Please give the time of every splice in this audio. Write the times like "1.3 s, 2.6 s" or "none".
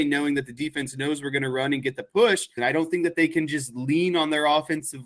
2.6 s